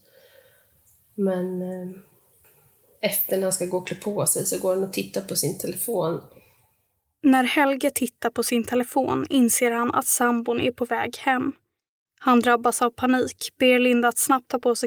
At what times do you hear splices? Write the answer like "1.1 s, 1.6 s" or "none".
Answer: none